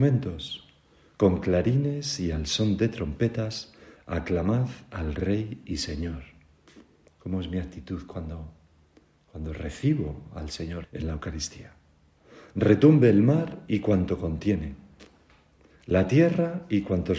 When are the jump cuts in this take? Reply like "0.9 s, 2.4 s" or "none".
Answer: 10.8 s